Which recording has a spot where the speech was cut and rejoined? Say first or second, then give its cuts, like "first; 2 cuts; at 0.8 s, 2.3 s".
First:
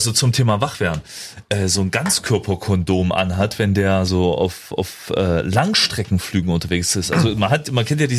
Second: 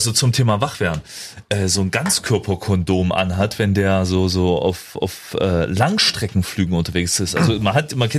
first; 1 cut; at 4.1 s